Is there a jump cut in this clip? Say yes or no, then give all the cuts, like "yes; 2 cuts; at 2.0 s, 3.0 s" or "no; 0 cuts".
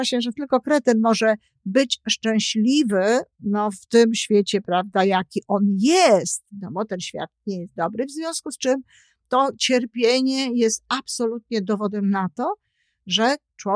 no; 0 cuts